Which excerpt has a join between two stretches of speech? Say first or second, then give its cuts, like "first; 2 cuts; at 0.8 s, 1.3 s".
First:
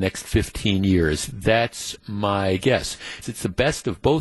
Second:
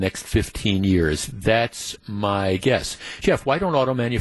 first; 1 cut; at 3.2 s